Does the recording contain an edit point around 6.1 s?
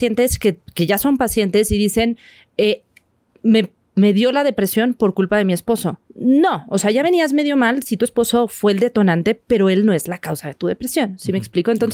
yes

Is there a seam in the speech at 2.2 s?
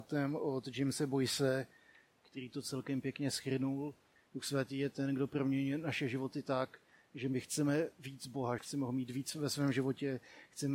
no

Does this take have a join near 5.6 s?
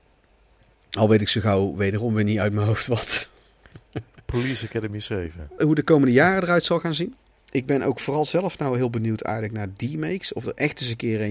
yes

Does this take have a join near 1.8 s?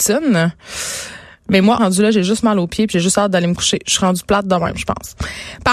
yes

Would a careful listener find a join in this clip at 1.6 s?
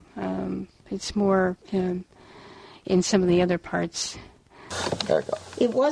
yes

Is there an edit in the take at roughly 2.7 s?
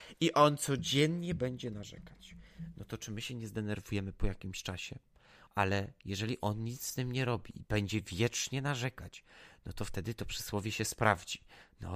no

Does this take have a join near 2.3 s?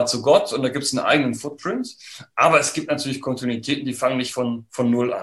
no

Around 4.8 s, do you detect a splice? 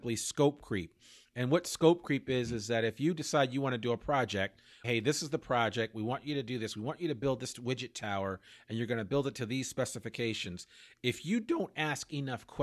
yes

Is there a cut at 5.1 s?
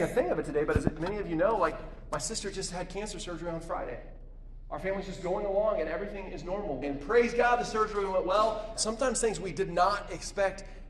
no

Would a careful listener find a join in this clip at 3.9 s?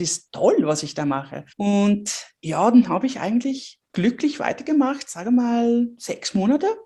yes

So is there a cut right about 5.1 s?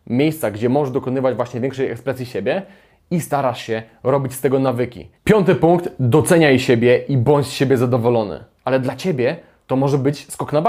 yes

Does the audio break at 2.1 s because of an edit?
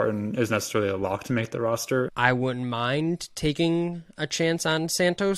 yes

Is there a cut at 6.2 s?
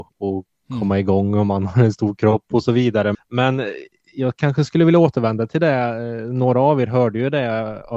no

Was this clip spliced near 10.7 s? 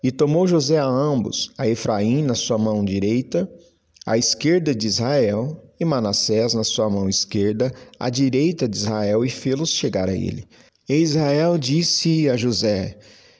yes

